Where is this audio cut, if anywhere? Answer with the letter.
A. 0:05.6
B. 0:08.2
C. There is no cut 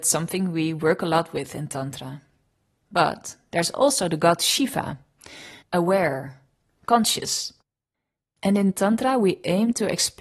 A